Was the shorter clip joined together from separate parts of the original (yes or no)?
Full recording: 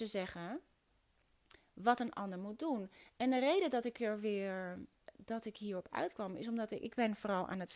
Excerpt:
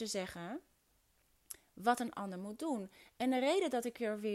no